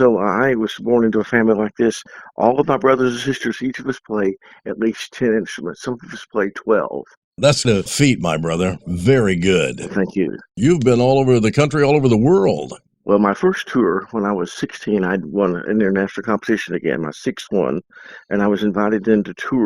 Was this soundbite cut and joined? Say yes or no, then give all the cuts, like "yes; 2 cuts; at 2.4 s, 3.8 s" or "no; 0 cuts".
yes; 1 cut; at 7.6 s